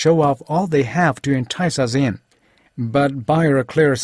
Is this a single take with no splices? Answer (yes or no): no